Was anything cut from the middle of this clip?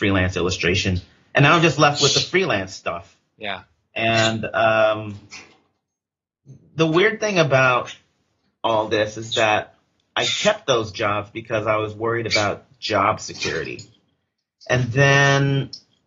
no; 0 cuts

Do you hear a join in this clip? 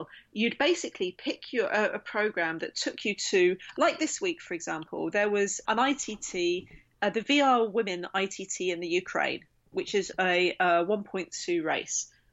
yes; 1 cut; at 5.6 s

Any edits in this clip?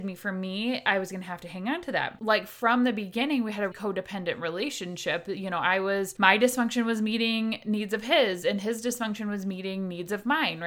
yes; 2 cuts; at 2.2 s, 3.7 s

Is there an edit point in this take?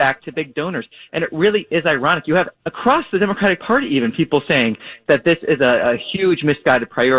yes; 1 cut; at 2.6 s

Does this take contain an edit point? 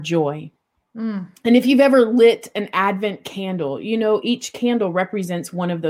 no; 0 cuts

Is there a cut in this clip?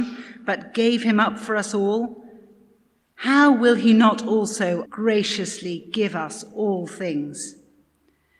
yes; 1 cut; at 4.9 s

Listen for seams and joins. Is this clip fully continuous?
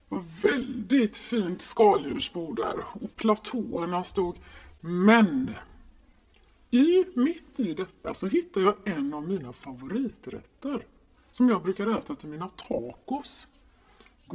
yes; 0 cuts

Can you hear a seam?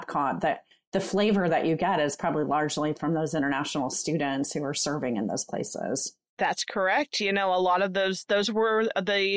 no; 0 cuts

